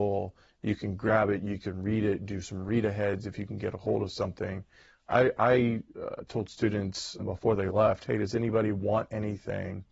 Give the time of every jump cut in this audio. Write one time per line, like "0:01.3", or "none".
0:07.2